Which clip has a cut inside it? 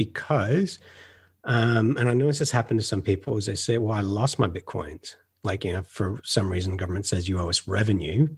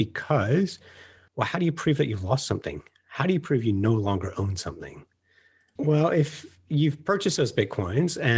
second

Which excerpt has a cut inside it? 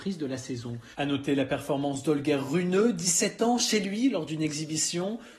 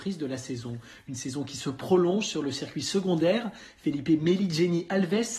first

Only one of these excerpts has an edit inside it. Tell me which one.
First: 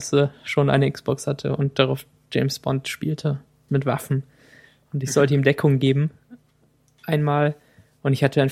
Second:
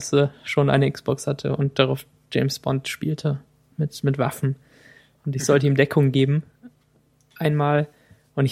first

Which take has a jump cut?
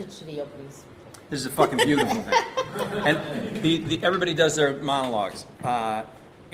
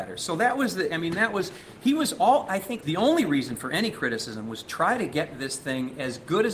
second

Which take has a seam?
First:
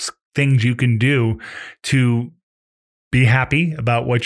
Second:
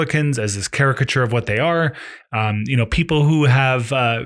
second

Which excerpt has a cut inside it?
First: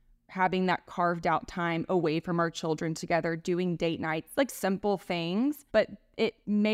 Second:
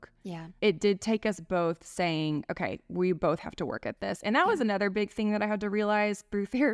first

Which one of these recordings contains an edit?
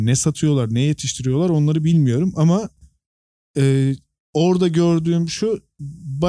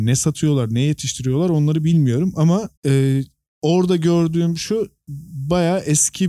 second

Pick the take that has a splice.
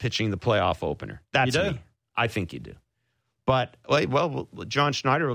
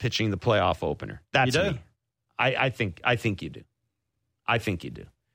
first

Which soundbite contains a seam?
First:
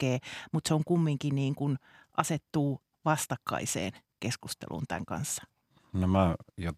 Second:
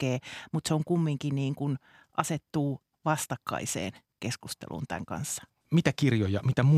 second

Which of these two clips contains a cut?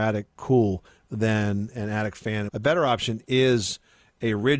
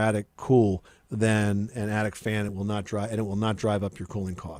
first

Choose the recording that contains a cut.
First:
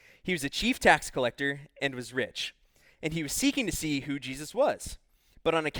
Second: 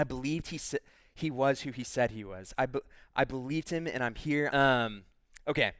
second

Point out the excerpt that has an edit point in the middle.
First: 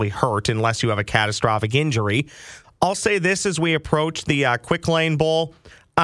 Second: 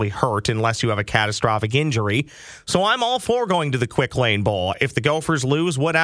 first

